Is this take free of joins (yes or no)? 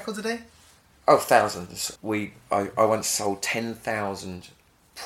no